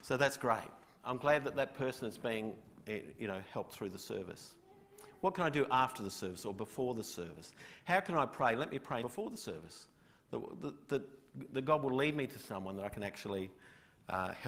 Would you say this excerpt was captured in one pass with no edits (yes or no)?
no